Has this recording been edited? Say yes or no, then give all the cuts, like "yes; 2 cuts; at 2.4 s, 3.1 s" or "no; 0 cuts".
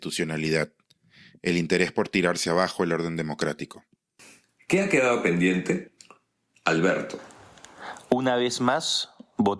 no; 0 cuts